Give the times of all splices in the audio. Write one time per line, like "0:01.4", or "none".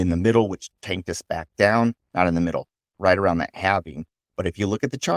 none